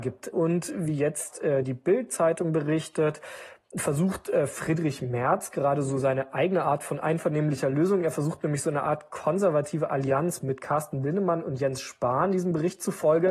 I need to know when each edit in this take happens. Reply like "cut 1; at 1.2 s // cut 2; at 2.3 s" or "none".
none